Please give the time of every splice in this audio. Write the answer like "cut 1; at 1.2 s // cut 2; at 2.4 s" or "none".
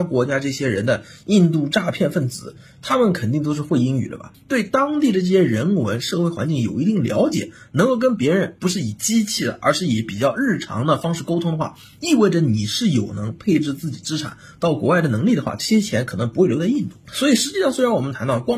cut 1; at 4.3 s